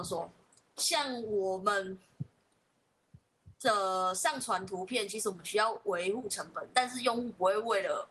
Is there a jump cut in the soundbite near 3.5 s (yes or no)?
yes